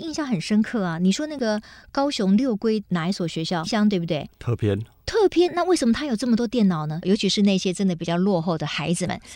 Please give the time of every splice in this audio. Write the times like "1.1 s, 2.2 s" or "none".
3.7 s, 7.0 s